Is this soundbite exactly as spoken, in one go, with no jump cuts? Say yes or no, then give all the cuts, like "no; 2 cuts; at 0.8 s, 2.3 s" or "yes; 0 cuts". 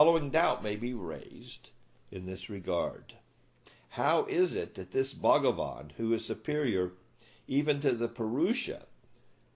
yes; 0 cuts